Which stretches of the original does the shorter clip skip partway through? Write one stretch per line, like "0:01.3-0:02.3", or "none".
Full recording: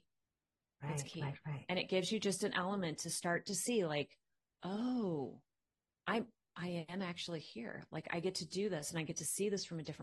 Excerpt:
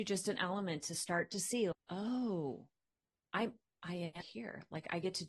0:03.9-0:04.5
0:06.9-0:07.4